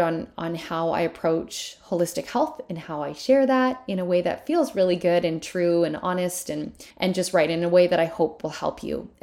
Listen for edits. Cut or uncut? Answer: cut